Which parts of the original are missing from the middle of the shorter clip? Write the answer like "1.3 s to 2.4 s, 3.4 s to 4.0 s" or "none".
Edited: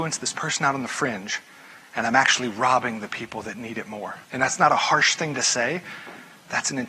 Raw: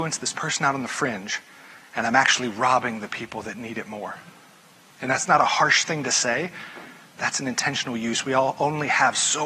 4.2 s to 4.9 s